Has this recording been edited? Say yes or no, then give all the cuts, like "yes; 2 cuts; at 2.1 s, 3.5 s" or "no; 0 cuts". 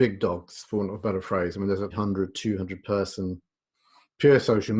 yes; 1 cut; at 1.9 s